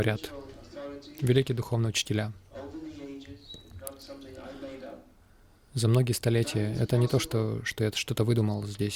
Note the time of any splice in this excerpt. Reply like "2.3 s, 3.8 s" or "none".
none